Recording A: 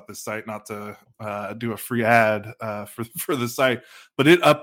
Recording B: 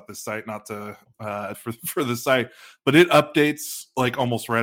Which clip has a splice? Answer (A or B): B